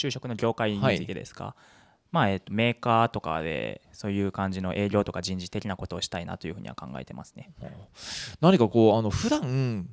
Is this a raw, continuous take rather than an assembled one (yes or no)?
yes